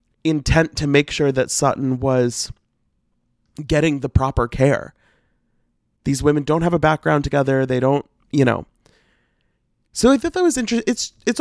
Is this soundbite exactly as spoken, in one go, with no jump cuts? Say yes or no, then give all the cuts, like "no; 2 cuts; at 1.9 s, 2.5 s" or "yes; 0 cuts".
yes; 0 cuts